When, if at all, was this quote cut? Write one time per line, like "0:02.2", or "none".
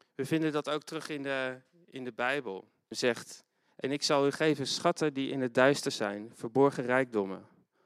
0:02.9